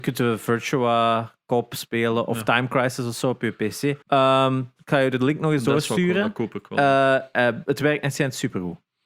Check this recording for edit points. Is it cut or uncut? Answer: cut